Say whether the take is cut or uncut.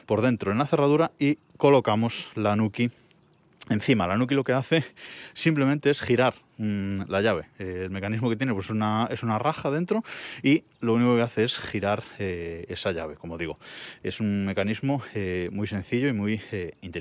uncut